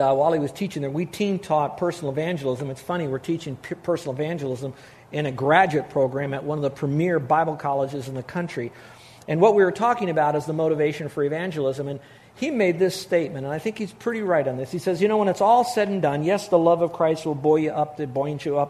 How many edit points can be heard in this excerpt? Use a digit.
0